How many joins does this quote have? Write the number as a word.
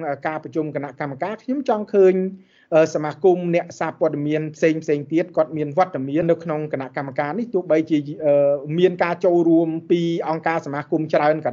one